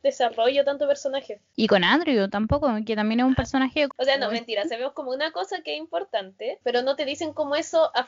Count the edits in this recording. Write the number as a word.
two